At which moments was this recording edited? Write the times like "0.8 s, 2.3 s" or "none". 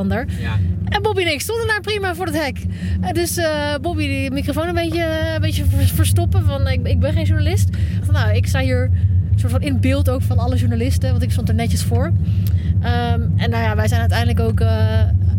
8.0 s